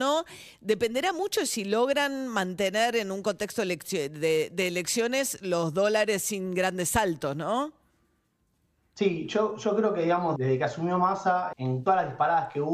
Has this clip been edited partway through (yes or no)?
yes